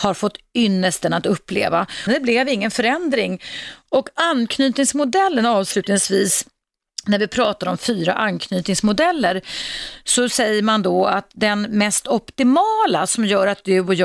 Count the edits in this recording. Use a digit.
2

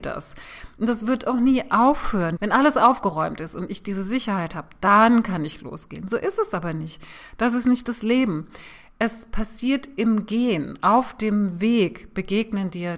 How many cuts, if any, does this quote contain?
1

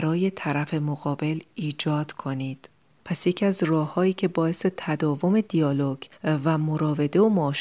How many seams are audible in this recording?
1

